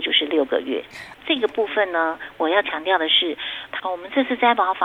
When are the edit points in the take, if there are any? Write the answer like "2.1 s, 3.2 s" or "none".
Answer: 3.8 s